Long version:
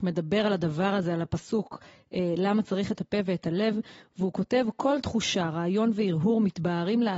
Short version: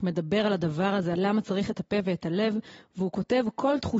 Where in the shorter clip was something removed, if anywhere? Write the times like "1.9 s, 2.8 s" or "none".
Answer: 1.2 s